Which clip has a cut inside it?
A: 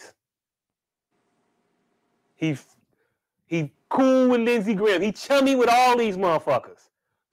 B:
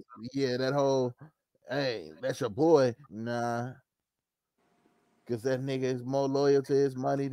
B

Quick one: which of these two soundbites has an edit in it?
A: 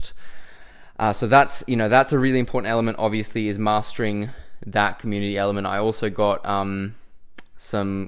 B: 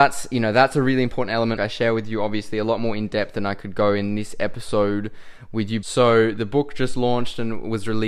B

